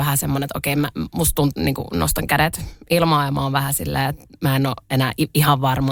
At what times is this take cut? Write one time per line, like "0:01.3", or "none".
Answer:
0:01.5